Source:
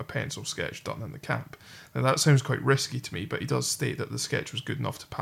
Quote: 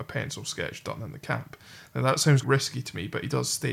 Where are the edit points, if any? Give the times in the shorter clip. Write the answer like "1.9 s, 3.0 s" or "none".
2.4 s